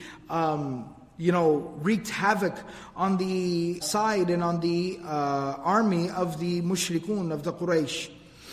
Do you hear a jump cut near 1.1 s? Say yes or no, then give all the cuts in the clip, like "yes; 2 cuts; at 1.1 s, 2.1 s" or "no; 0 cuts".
no; 1 cut; at 3.8 s